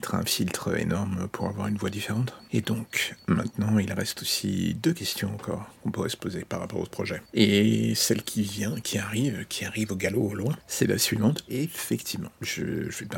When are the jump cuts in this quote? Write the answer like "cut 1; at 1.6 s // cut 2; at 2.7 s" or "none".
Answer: cut 1; at 11.5 s